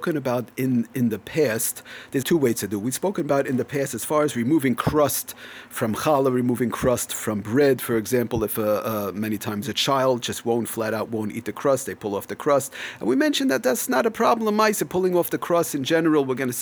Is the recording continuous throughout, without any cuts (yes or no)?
no